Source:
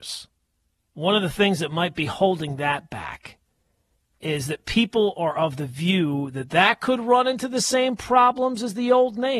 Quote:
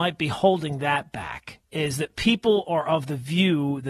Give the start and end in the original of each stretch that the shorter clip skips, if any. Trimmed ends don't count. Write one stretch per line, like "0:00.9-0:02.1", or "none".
0:03.5-0:04.2

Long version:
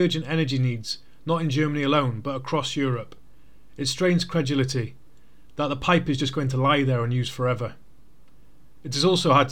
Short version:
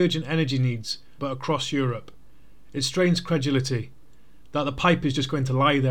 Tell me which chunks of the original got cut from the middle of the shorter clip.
0:01.2-0:02.2

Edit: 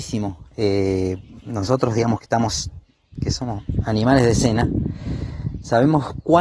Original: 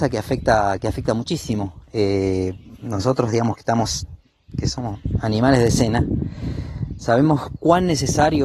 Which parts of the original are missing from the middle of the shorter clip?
none

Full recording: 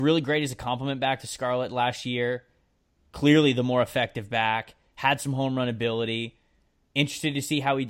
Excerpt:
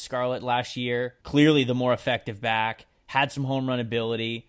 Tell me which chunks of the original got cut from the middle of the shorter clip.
0:02.5-0:03.1

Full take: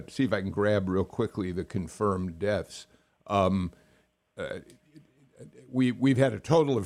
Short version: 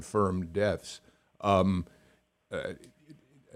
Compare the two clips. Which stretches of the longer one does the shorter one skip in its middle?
none

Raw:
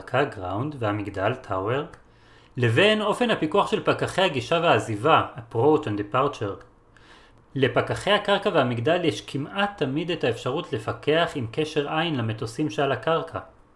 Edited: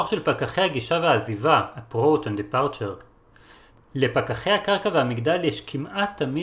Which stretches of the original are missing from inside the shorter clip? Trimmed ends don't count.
none

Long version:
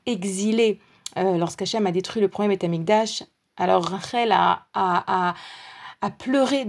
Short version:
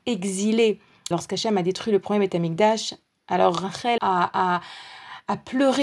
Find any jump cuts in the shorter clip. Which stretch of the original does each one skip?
0:01.1-0:01.4
0:04.3-0:04.7

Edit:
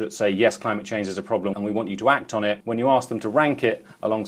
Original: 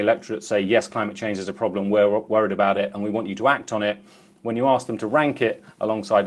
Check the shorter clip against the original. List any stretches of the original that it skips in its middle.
0:01.8-0:02.9
0:04.0-0:04.4

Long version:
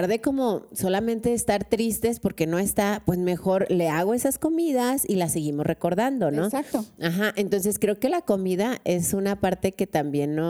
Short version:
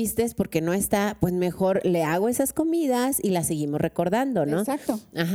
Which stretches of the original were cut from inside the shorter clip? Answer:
none

